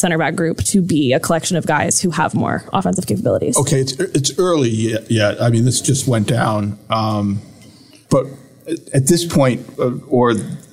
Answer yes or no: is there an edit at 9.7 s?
yes